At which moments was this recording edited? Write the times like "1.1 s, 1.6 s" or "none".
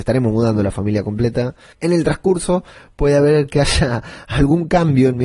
1.7 s